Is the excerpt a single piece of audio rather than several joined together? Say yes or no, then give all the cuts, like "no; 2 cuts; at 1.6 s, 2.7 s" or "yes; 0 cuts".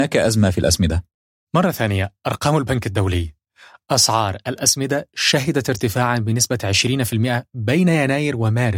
yes; 0 cuts